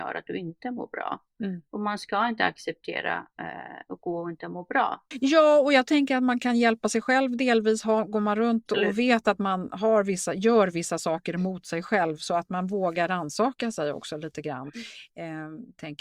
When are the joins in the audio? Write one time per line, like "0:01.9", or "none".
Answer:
0:05.1

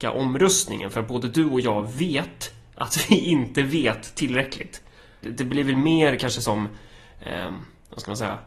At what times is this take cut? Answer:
0:05.2

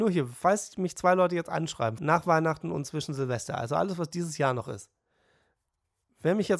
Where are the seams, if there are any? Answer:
0:02.0

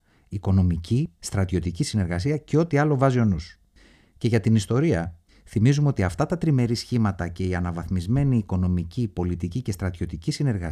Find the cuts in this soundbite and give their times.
0:01.2

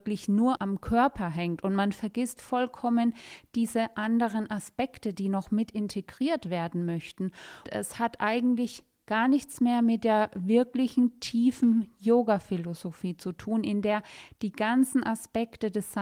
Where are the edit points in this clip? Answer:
0:07.6

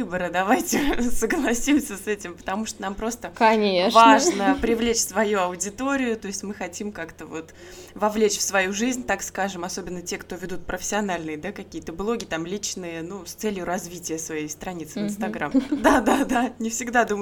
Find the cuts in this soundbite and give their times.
0:15.5

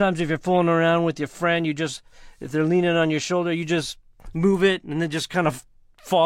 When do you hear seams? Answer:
none

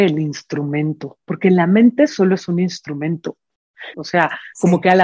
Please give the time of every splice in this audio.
0:03.9

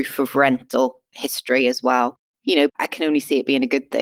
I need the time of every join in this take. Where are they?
0:02.7

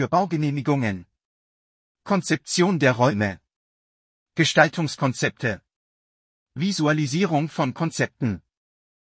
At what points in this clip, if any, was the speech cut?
none

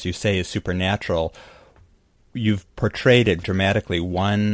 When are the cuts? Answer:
0:03.4

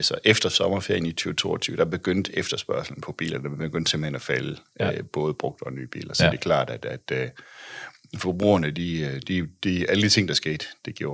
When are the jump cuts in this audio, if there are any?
none

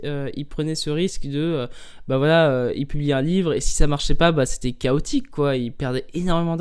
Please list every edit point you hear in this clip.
none

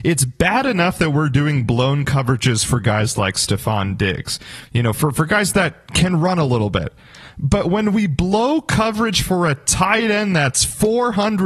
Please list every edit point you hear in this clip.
0:04.7

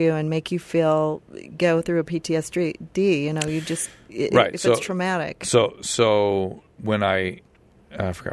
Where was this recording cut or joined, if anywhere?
none

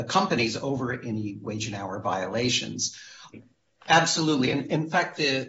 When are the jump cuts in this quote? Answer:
0:03.3

